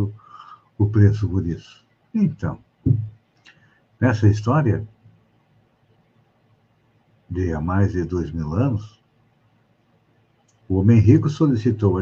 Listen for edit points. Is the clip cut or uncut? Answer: uncut